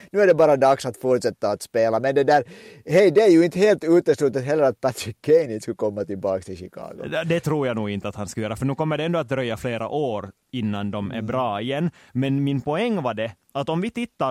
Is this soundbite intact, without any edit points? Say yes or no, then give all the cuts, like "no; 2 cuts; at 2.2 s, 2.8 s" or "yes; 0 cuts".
yes; 0 cuts